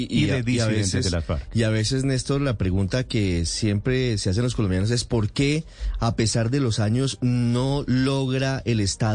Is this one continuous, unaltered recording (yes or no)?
yes